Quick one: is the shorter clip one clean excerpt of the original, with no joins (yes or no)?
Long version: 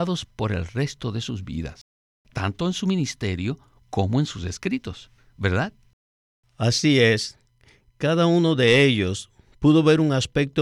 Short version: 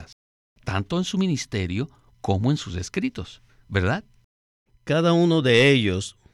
no